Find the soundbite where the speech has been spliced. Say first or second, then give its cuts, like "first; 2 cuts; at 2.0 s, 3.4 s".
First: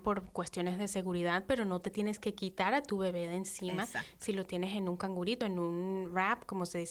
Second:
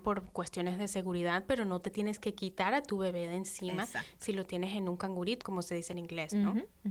second; 1 cut; at 5.4 s